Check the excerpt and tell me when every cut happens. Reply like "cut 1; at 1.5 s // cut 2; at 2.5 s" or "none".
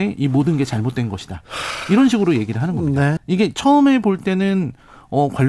cut 1; at 3.2 s